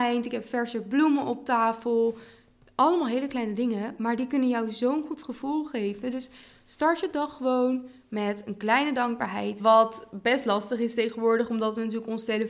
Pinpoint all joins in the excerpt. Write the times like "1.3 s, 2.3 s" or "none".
9.6 s